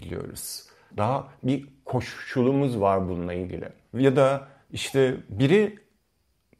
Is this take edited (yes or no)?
yes